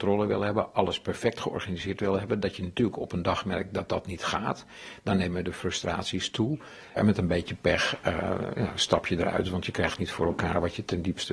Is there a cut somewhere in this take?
no; 0 cuts

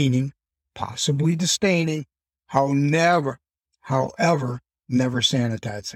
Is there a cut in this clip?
no; 0 cuts

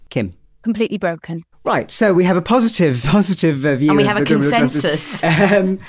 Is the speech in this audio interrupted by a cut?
yes; 2 cuts; at 1.5 s, 3.0 s

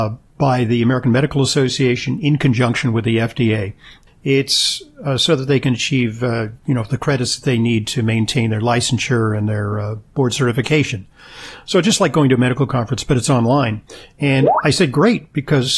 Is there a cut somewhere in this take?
yes; 1 cut; at 4.1 s

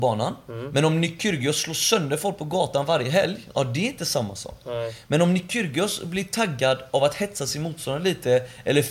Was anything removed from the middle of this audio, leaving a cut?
no; 0 cuts

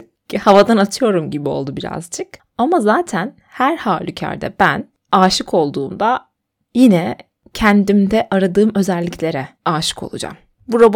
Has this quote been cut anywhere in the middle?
yes; 1 cut; at 9.6 s

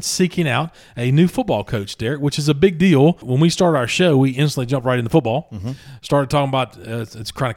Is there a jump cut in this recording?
no; 0 cuts

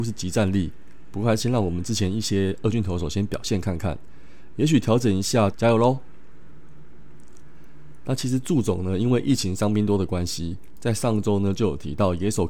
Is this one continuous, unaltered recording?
no; 2 cuts; at 5.5 s, 8.0 s

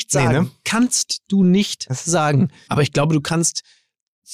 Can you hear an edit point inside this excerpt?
yes; 1 cut; at 2.7 s

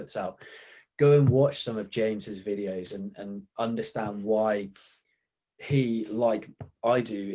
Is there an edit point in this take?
no; 0 cuts

